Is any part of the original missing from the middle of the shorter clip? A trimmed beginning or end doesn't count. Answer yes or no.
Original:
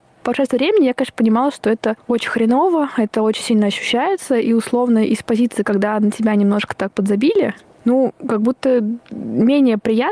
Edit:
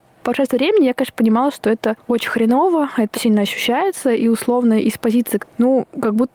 yes